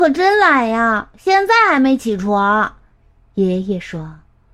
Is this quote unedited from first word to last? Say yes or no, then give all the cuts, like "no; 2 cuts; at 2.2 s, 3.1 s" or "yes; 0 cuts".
no; 1 cut; at 3.0 s